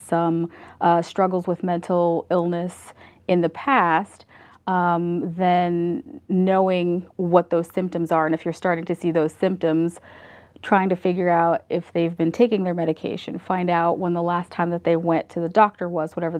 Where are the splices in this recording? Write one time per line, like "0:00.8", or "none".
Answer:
none